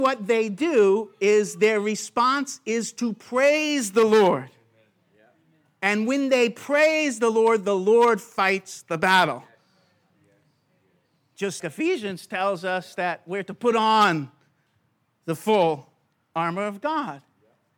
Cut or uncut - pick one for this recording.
cut